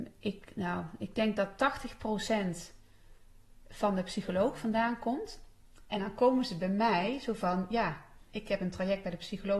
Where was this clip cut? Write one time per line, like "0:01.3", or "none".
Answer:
none